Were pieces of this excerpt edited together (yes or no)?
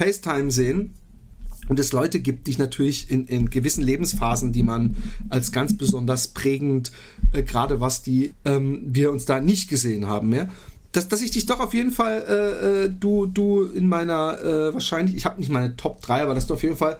yes